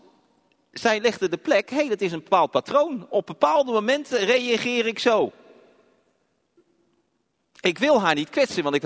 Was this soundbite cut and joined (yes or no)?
no